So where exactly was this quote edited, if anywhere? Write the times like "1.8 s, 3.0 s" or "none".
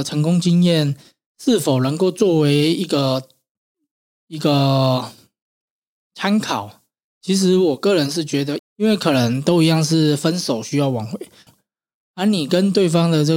8.6 s, 11.5 s

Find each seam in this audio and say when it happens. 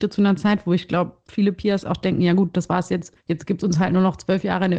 none

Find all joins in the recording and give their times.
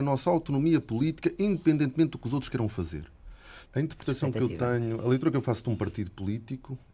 3.6 s

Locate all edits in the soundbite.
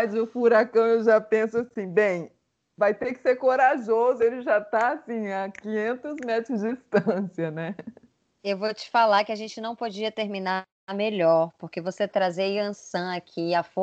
4.2 s

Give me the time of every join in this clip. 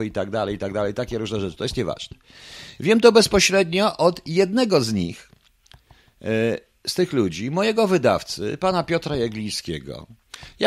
none

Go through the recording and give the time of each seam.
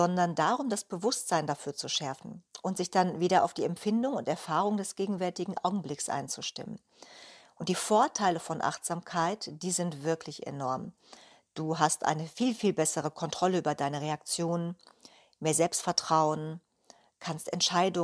none

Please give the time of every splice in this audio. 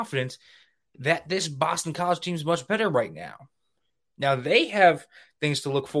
none

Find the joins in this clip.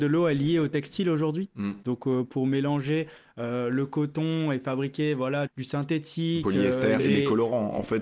1.8 s, 5.5 s, 7.0 s

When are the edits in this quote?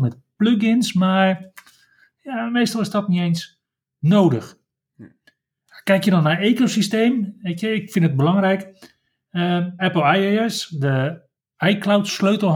9.8 s

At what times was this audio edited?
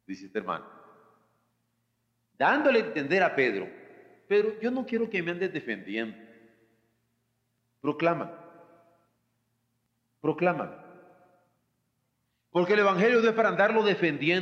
none

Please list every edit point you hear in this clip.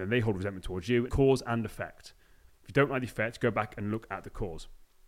1.1 s

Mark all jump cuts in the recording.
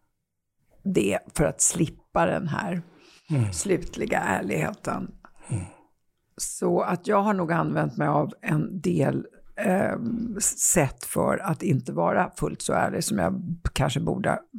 none

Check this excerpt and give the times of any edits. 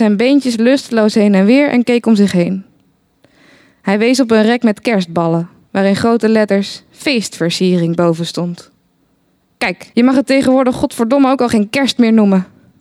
9.9 s

